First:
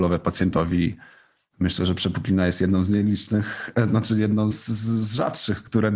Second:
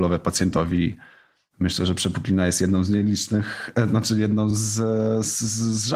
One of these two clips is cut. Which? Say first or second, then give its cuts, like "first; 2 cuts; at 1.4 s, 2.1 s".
first; 1 cut; at 4.5 s